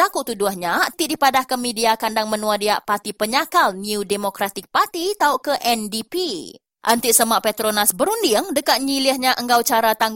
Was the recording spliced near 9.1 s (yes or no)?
no